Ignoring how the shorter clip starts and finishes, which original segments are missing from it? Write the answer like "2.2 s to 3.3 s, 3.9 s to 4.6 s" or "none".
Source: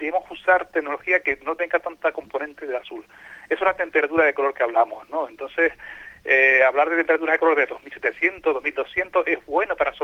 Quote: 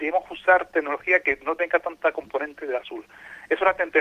none